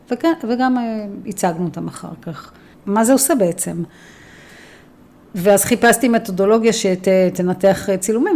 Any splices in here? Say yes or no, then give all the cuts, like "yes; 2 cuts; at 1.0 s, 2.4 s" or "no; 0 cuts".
yes; 1 cut; at 2.7 s